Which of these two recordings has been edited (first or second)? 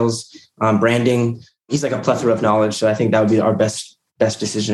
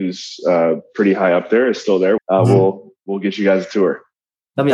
second